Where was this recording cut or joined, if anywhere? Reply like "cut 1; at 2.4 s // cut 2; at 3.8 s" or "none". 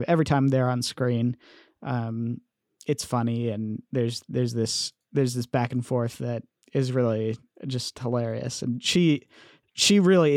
cut 1; at 6.6 s